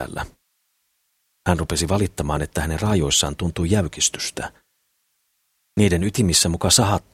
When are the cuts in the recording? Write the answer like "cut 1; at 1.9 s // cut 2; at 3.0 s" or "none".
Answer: none